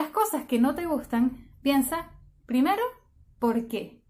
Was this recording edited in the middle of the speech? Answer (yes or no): no